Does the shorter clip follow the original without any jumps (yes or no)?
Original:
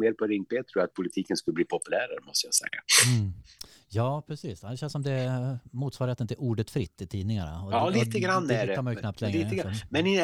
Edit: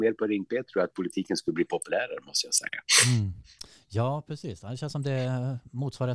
yes